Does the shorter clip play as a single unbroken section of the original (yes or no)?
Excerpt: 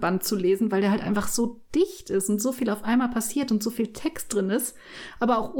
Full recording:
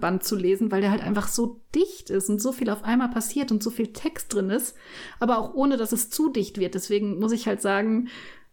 yes